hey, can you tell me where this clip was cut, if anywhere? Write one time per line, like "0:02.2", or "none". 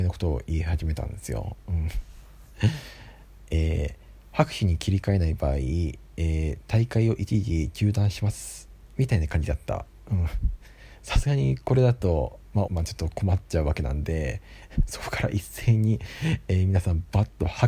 0:12.7